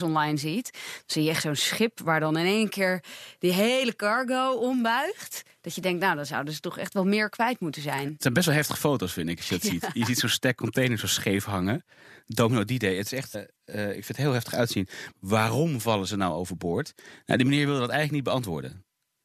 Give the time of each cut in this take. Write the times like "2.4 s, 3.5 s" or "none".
13.3 s, 15.1 s